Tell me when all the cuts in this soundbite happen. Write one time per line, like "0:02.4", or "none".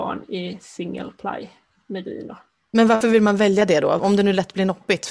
0:04.0